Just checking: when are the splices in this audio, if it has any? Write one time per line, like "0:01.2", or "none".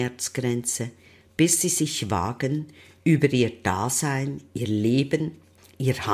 none